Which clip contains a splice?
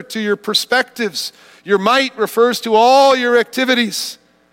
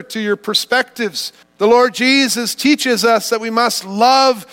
second; 1 cut; at 1.4 s

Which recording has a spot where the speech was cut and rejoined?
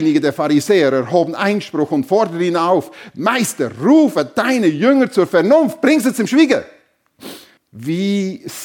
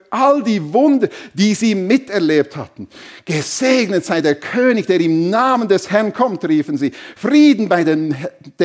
first; 1 cut; at 7.6 s

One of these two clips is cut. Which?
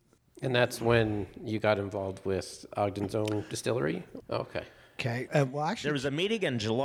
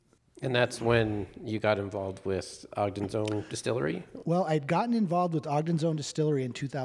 first; 2 cuts; at 4.2 s, 5.3 s

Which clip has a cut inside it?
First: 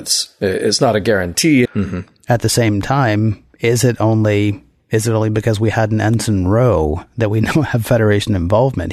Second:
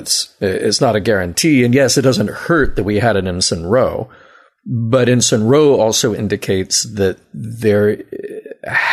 first; 1 cut; at 1.6 s

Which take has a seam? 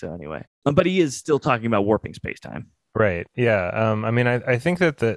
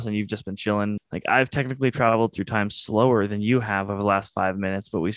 second; 1 cut; at 1.0 s

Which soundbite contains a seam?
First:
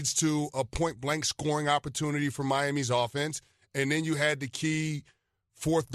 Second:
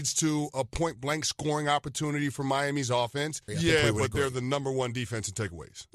second; 1 cut; at 3.5 s

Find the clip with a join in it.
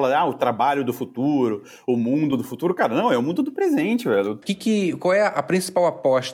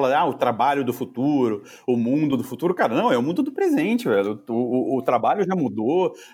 first; 1 cut; at 4.4 s

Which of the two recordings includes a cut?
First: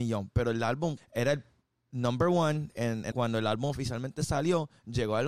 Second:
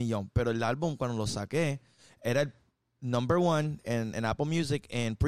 first; 2 cuts; at 1.0 s, 3.1 s

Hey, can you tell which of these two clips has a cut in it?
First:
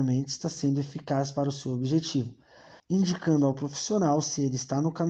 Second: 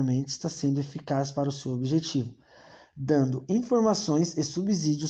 first; 1 cut; at 2.8 s

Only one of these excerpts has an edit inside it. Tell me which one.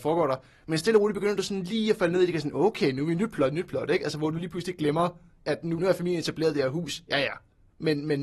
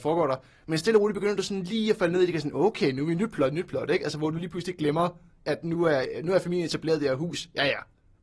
first; 1 cut; at 5.8 s

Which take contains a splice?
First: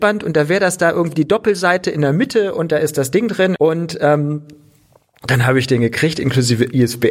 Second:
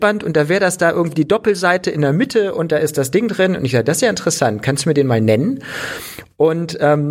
first; 1 cut; at 3.6 s

